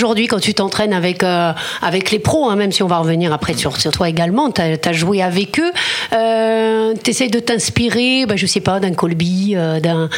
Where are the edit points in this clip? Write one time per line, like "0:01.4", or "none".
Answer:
0:03.9